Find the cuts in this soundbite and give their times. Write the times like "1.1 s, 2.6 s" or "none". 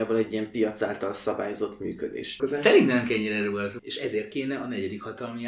3.8 s

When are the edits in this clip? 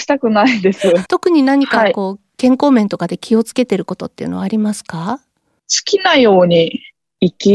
1.0 s

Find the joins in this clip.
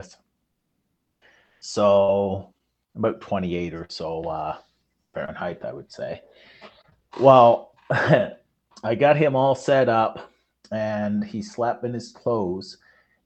none

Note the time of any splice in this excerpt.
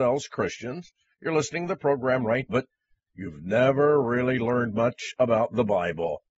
2.5 s

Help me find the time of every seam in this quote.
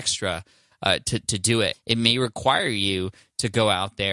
1.7 s

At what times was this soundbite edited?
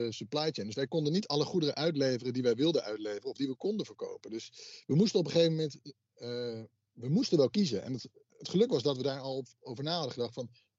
none

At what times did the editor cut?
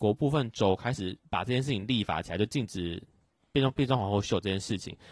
1.2 s

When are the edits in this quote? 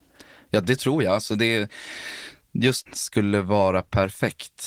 2.9 s

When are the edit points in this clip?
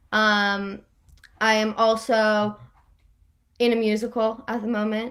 none

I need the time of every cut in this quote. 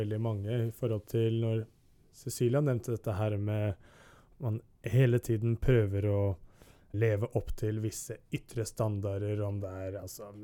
6.9 s

